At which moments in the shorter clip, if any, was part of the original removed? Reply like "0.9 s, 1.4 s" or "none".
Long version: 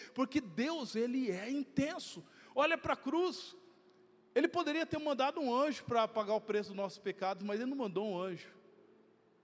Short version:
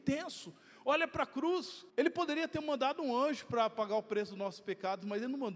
1.9 s